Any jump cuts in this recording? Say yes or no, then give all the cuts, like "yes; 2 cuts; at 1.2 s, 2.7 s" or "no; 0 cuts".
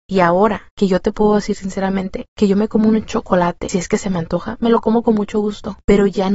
no; 0 cuts